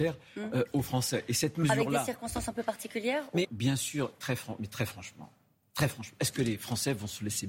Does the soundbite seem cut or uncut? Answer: cut